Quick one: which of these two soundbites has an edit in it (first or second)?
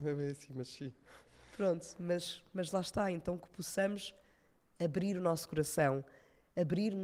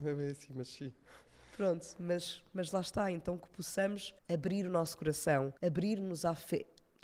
second